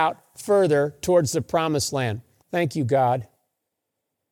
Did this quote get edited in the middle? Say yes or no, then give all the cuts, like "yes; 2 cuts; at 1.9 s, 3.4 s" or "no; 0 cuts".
yes; 1 cut; at 2.4 s